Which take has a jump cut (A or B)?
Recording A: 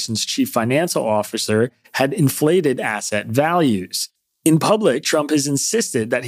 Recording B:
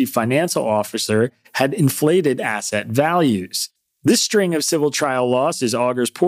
A